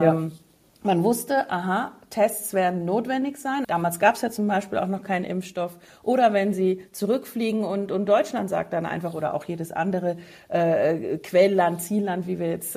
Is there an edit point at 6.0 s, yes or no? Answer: no